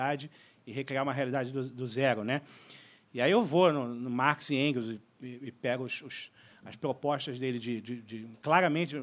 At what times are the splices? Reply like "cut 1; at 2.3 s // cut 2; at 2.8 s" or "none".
none